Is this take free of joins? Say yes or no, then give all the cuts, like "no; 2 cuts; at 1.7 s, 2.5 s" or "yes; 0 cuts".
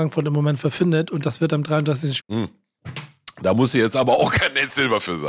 no; 1 cut; at 2.2 s